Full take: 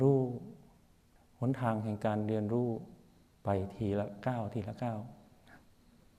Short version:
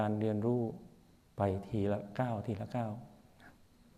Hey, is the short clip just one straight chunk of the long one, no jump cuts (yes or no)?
yes